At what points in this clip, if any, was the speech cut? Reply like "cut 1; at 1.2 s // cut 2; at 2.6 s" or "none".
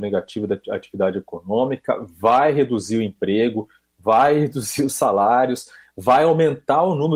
none